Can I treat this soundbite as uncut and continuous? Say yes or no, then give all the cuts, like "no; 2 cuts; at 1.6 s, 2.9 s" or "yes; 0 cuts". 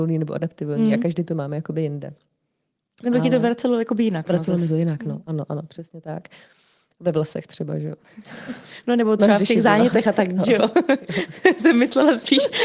yes; 0 cuts